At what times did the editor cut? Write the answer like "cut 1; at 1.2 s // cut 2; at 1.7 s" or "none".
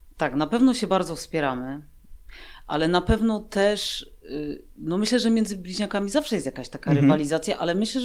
none